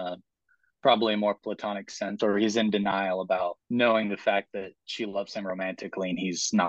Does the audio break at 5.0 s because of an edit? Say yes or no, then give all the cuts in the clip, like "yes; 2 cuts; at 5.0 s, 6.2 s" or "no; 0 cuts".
no; 2 cuts; at 2.2 s, 3.6 s